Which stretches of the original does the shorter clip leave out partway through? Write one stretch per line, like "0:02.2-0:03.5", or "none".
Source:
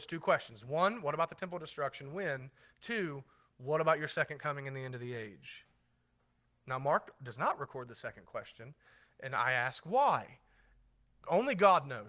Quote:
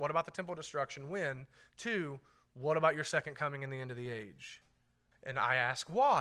0:06.2-0:09.1